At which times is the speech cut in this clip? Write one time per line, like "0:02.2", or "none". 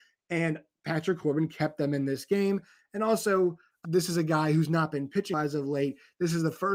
0:03.8
0:05.3